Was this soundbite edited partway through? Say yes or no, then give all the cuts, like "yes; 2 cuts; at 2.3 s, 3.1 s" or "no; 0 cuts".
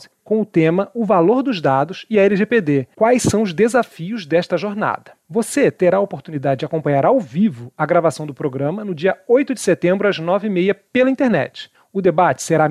no; 0 cuts